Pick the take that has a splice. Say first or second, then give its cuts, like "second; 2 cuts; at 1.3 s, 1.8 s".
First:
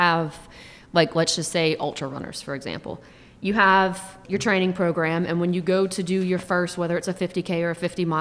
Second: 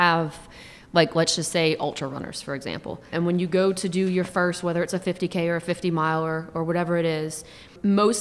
second; 1 cut; at 3.1 s